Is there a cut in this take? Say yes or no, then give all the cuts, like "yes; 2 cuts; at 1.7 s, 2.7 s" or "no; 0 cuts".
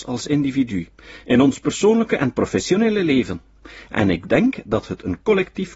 no; 0 cuts